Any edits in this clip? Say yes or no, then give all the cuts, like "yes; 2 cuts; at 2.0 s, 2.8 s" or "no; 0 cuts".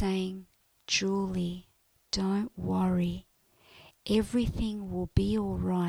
no; 0 cuts